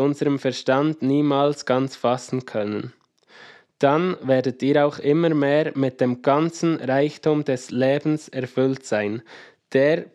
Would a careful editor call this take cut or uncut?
uncut